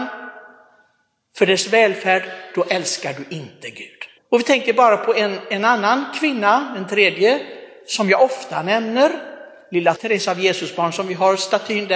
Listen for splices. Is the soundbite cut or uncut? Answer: cut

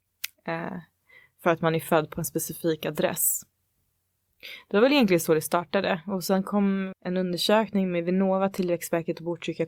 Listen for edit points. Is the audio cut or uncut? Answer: cut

